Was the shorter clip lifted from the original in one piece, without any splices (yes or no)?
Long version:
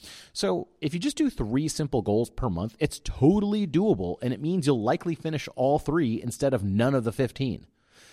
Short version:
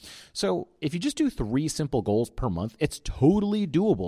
yes